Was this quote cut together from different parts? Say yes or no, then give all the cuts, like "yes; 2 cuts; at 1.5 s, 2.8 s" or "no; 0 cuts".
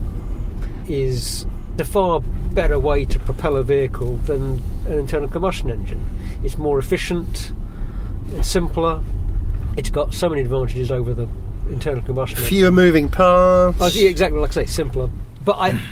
no; 0 cuts